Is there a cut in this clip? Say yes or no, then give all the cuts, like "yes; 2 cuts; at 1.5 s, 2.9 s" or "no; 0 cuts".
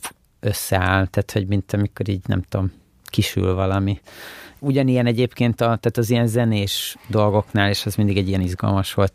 no; 0 cuts